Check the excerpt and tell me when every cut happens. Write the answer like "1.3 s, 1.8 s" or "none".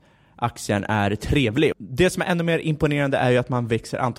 1.7 s

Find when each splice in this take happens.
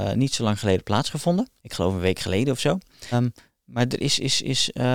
1.6 s, 3.1 s

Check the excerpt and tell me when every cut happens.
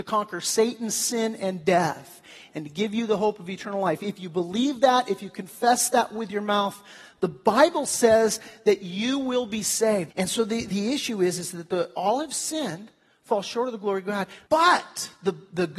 10.1 s, 14.5 s

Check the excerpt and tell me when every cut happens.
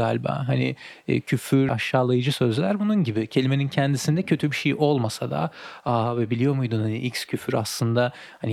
1.7 s

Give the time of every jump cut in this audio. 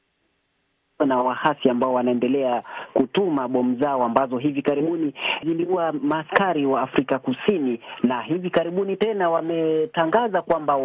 5.4 s

